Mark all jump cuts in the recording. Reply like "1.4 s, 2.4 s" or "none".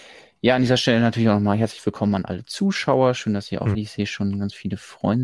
3.7 s